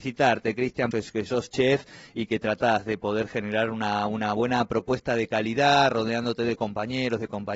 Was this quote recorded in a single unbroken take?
no; 1 cut; at 0.9 s

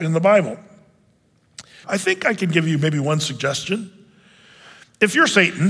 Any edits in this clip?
yes; 1 cut; at 1.8 s

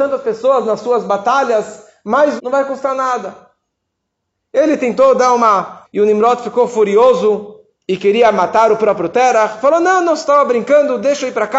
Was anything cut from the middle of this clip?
yes; 2 cuts; at 2.4 s, 5.8 s

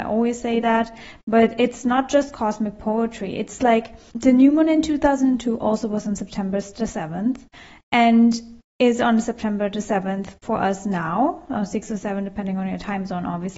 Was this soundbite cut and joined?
no; 0 cuts

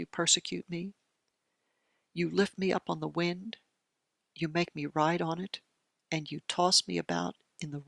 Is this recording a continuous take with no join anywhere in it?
yes; 0 cuts

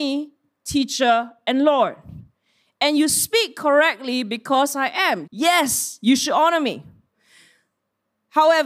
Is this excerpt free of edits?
no; 1 cut; at 5.3 s

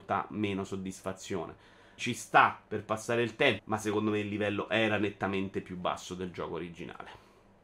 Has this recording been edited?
yes; 2 cuts; at 2.0 s, 3.6 s

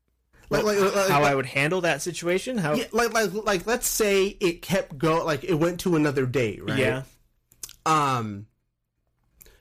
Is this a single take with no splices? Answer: yes; 0 cuts

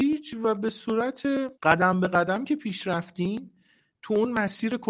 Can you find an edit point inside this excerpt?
yes; 1 cut; at 1.6 s

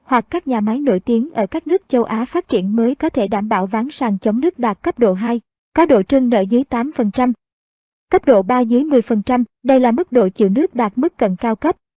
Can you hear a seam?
yes; 1 cut; at 9.5 s

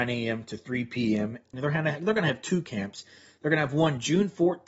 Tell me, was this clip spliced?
yes; 1 cut; at 1.5 s

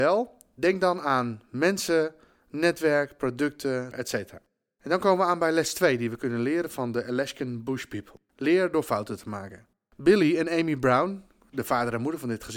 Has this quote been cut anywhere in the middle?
yes; 1 cut; at 3.9 s

